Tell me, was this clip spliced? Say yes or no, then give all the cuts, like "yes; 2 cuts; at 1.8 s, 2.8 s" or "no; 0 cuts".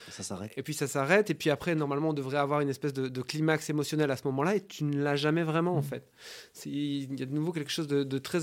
no; 0 cuts